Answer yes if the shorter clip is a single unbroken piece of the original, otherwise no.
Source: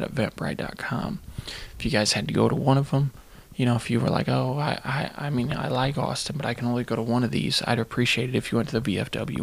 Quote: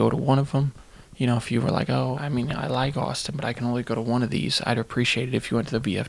no